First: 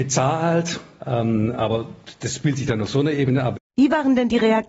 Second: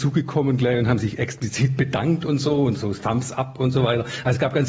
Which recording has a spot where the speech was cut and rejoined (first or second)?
first